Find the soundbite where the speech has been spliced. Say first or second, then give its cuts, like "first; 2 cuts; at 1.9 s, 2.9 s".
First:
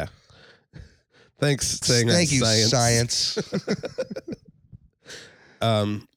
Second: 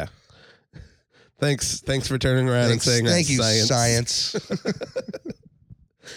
first; 1 cut; at 1.8 s